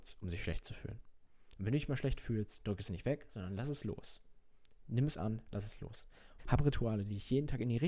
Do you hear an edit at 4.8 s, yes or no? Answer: no